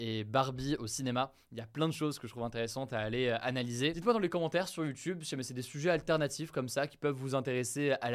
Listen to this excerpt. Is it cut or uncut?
uncut